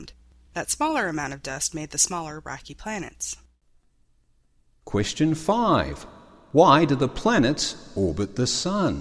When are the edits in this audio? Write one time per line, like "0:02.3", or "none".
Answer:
none